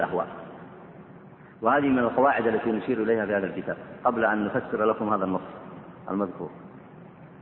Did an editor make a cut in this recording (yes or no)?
no